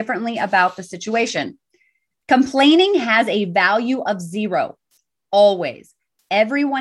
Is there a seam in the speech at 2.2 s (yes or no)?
yes